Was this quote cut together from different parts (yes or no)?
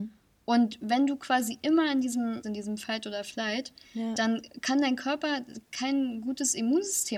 yes